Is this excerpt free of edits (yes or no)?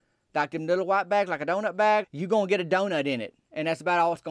no